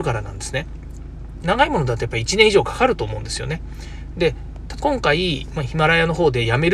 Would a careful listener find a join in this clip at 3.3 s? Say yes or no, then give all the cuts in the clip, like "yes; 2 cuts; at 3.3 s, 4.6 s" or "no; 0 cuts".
no; 2 cuts; at 1.4 s, 4.8 s